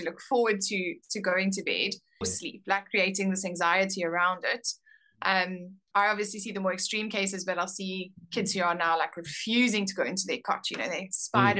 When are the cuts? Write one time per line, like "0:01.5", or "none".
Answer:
0:02.2
0:05.9